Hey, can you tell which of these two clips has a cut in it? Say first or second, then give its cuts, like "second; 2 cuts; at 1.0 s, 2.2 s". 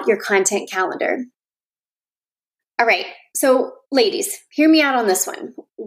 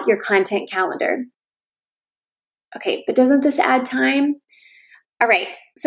first; 2 cuts; at 2.6 s, 3.8 s